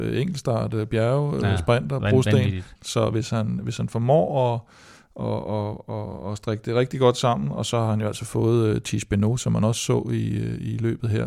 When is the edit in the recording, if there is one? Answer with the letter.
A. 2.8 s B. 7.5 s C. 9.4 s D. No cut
A